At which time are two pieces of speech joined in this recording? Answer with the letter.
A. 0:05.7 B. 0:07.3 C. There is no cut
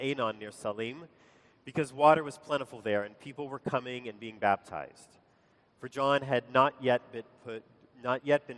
C